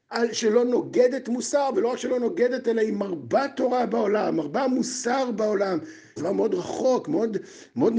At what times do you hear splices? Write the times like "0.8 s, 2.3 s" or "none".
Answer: 6.2 s

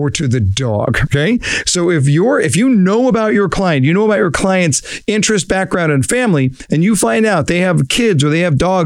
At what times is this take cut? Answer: none

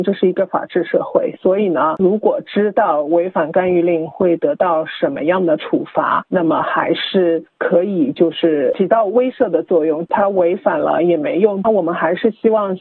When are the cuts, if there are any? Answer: 2.0 s, 10.1 s, 11.6 s

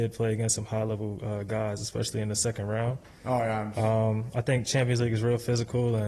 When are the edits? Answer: none

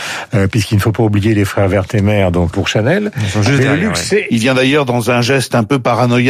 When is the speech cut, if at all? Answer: 2.5 s, 4.3 s

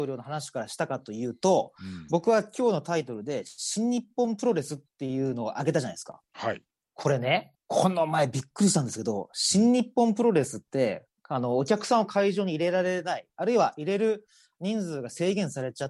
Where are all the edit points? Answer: 7.5 s

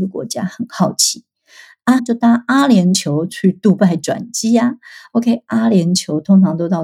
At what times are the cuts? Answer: 2.0 s

